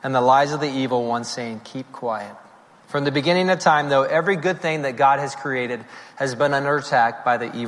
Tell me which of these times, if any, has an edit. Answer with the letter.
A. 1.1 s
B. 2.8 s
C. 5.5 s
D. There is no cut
B